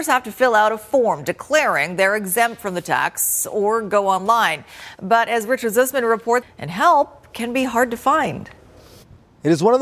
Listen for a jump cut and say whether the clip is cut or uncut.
cut